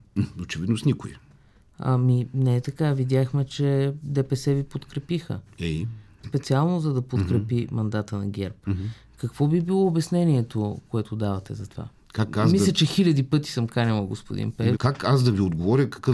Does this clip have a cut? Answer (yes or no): yes